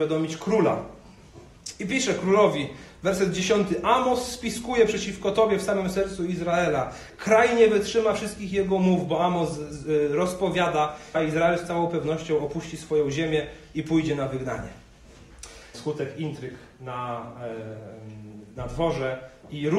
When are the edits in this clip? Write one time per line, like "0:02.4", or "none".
0:11.1
0:15.7